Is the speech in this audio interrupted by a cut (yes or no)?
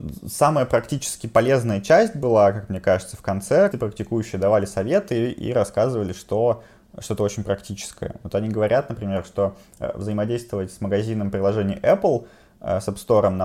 yes